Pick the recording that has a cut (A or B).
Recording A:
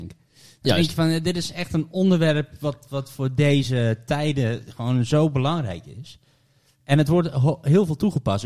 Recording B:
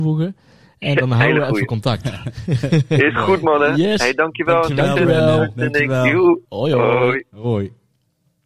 B